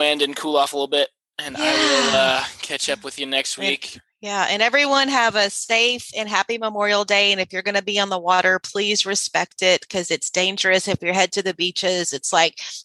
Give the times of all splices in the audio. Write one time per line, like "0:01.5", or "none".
none